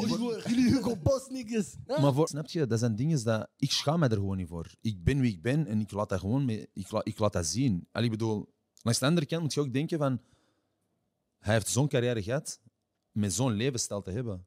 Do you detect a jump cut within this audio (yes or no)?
yes